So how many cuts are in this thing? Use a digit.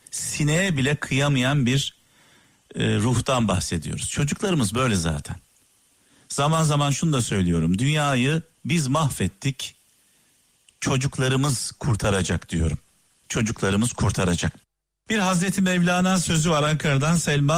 1